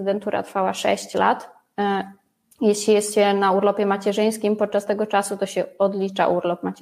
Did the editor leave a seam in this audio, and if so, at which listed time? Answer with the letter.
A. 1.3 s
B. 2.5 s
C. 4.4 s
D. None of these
B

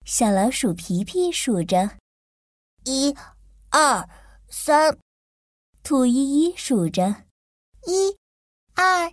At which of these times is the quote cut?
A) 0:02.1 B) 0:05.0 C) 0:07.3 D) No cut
D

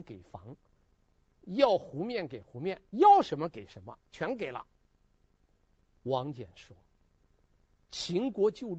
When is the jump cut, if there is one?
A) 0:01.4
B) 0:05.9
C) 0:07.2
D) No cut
B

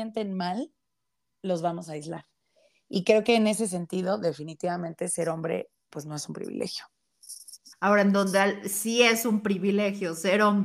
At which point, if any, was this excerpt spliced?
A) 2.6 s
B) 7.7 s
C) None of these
B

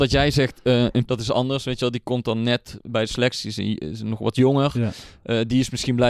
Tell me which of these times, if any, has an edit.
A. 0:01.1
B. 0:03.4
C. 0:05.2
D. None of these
A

